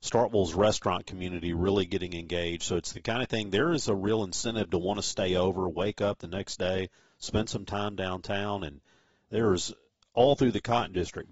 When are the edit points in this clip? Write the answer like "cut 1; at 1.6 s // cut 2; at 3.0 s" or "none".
none

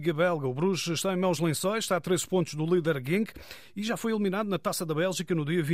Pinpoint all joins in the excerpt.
none

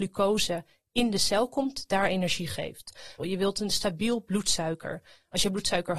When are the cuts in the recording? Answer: cut 1; at 3.2 s

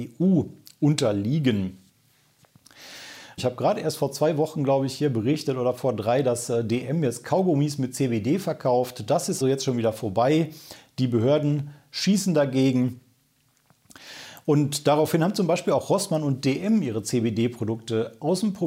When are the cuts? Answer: cut 1; at 3.4 s // cut 2; at 9.4 s // cut 3; at 14.4 s

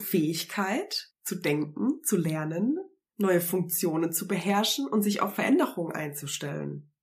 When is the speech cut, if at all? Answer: none

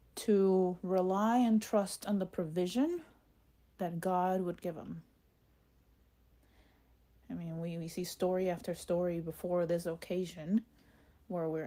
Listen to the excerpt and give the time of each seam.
cut 1; at 7.2 s

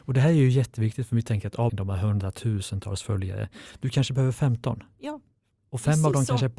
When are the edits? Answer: cut 1; at 1.7 s

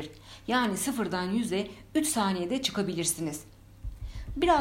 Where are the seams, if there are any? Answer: none

